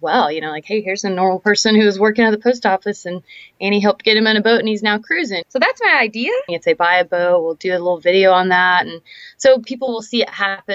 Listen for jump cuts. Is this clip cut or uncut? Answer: cut